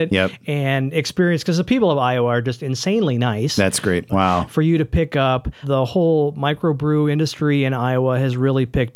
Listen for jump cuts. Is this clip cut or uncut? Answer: cut